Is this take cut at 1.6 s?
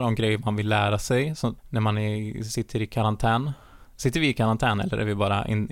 yes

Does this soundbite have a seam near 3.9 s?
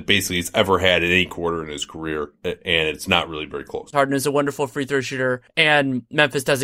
yes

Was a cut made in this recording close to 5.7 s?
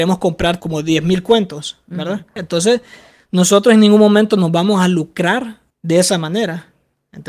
yes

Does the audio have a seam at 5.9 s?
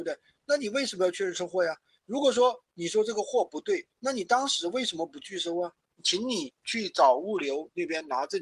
yes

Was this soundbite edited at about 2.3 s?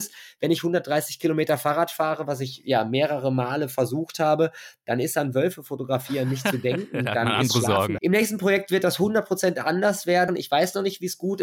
no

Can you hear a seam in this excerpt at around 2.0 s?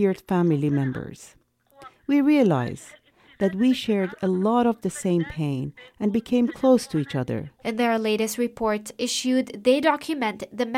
no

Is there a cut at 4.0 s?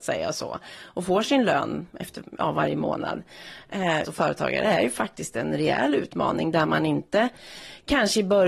yes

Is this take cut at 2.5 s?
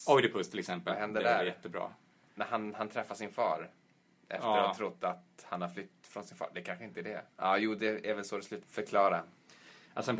no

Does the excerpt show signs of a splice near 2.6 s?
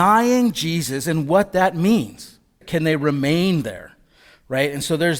yes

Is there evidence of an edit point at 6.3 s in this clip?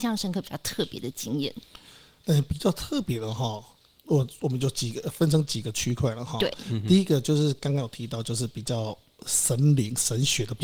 no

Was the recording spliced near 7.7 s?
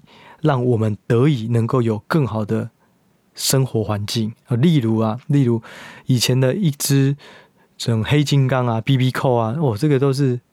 no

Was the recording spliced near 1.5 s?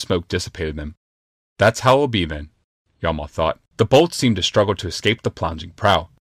no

